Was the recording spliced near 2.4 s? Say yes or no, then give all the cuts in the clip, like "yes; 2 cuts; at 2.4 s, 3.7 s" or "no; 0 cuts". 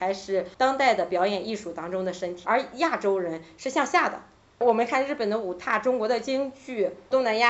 yes; 1 cut; at 2.4 s